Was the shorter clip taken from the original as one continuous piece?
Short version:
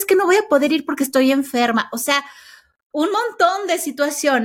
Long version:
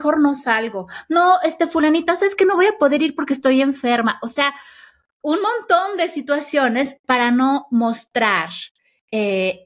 yes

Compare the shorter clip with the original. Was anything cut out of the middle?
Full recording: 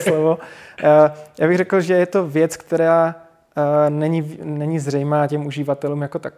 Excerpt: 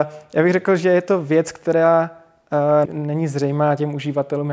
yes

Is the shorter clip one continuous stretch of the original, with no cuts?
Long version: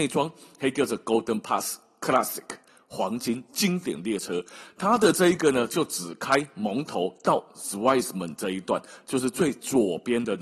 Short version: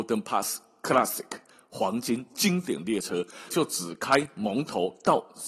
no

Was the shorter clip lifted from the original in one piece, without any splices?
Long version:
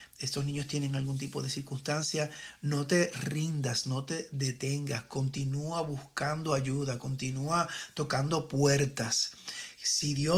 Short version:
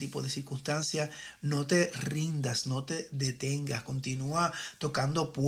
no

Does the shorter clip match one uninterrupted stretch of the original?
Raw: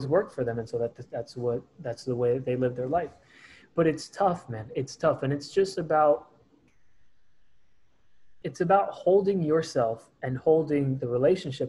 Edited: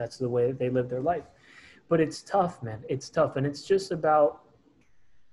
yes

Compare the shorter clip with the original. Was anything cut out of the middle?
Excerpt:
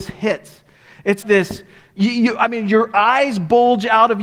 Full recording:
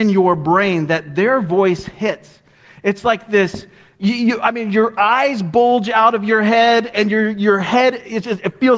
yes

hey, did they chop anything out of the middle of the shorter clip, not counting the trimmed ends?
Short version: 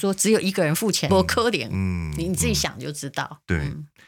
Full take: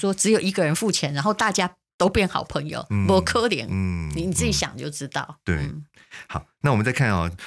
yes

